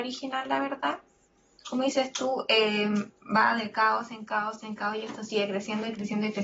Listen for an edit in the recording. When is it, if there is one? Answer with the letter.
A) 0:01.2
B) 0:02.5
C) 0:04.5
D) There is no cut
D